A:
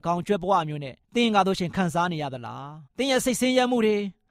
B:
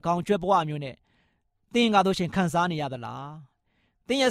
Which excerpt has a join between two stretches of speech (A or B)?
A